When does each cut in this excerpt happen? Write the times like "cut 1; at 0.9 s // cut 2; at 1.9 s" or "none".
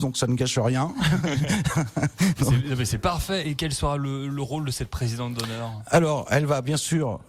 none